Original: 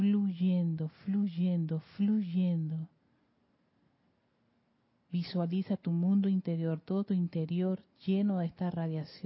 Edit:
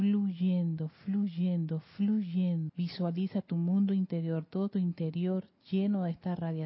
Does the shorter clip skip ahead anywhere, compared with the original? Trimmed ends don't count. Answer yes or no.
yes